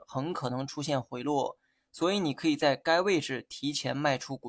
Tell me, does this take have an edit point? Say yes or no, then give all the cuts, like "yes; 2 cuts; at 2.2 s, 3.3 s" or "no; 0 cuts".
no; 0 cuts